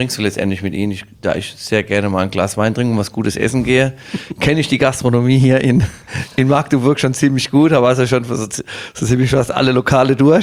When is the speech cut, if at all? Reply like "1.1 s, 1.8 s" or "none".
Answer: none